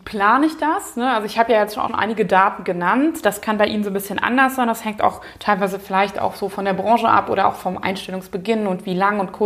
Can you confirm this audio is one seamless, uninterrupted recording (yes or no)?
no